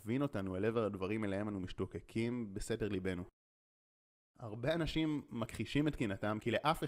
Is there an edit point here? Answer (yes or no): no